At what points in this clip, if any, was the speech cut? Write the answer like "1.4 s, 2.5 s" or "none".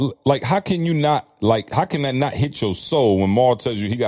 none